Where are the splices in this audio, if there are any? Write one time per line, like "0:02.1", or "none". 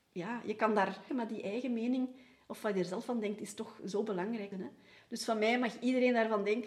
0:01.1
0:04.5